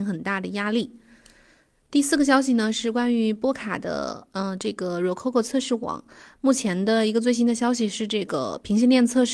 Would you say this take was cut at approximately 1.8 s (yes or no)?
no